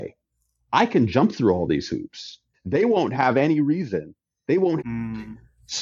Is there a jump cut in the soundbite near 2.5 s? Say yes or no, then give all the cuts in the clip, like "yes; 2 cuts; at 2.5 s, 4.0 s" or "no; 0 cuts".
yes; 2 cuts; at 2.5 s, 4.8 s